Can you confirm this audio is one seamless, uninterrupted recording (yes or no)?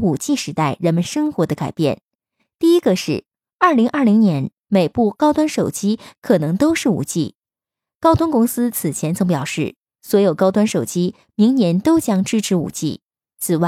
yes